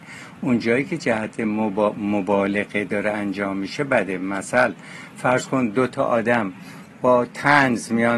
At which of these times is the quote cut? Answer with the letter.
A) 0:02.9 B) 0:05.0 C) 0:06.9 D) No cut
A